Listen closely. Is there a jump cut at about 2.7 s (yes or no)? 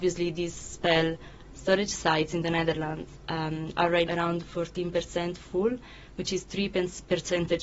no